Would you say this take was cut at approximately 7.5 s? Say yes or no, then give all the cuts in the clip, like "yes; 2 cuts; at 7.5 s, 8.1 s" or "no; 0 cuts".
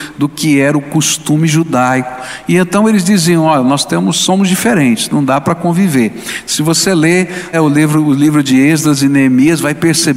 yes; 1 cut; at 7.5 s